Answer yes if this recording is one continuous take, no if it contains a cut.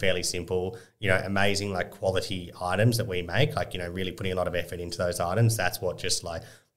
yes